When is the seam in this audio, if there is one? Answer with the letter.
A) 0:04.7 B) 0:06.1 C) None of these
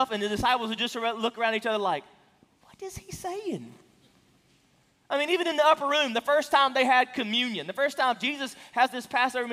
C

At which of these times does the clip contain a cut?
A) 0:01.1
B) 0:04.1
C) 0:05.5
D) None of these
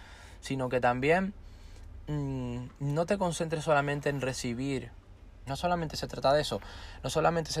C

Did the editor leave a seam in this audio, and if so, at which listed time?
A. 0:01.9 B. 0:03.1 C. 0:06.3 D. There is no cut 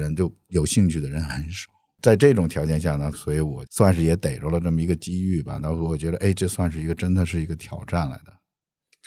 B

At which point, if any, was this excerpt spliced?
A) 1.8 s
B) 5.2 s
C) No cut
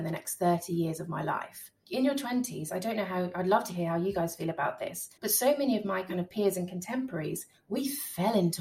B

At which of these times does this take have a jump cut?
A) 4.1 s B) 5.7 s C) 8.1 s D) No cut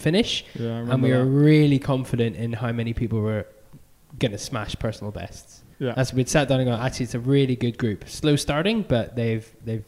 B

